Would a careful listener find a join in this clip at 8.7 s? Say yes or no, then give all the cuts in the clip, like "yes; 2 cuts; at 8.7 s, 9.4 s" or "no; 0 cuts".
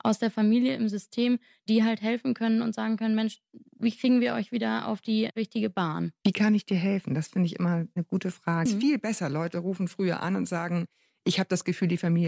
yes; 1 cut; at 8.7 s